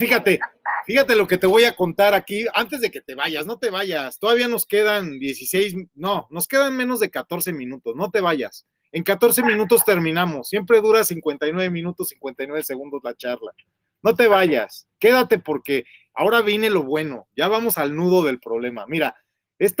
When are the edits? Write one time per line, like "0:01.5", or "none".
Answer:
none